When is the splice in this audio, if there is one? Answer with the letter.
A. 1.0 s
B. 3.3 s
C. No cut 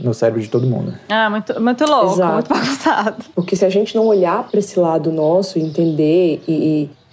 B